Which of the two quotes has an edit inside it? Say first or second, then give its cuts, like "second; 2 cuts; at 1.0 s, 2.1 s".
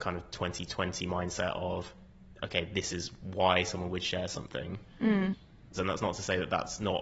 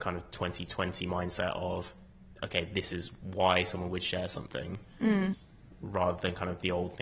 first; 1 cut; at 5.7 s